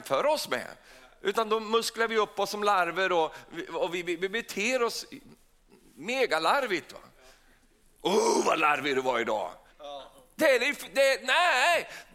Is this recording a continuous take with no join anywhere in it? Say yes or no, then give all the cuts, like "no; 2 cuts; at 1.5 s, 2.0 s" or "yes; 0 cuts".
no; 1 cut; at 9.7 s